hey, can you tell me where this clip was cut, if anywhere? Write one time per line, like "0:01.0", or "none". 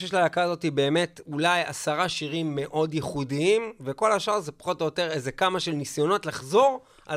none